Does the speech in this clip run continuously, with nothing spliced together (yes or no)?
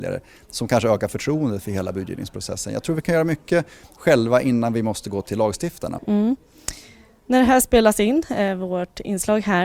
no